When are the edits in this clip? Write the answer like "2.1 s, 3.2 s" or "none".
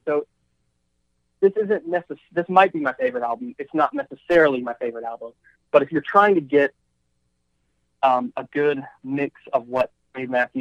none